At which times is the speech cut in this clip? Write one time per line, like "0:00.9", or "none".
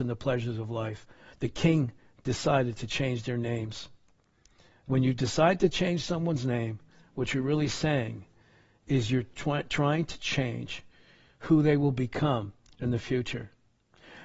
none